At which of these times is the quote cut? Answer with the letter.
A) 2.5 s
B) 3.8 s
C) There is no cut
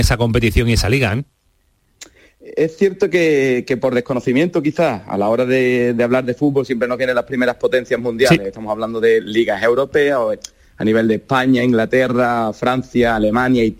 C